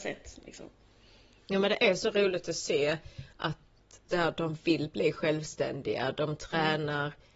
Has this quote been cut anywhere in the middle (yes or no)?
yes